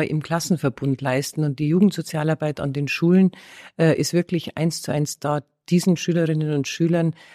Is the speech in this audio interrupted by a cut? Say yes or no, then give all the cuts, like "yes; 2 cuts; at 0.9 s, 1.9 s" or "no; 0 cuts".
no; 0 cuts